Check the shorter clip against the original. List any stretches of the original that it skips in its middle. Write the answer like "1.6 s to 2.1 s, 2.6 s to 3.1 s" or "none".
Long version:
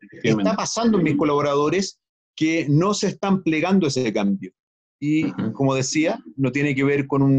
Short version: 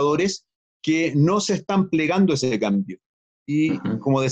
none